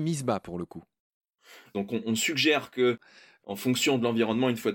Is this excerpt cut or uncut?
cut